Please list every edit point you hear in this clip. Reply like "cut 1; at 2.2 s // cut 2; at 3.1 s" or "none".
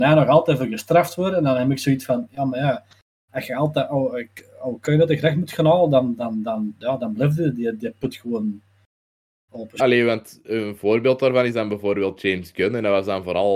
cut 1; at 9.8 s